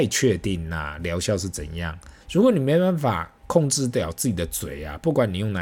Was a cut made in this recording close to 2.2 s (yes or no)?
yes